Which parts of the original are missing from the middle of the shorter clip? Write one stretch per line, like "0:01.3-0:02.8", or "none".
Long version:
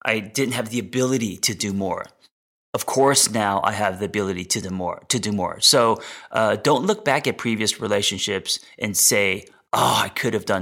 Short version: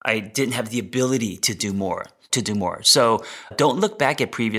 0:02.3-0:05.1
0:06.3-0:06.6